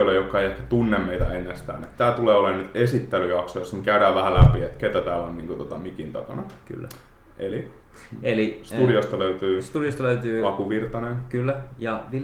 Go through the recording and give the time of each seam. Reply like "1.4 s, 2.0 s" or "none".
none